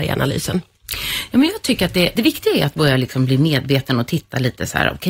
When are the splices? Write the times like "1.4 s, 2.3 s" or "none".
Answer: 2.2 s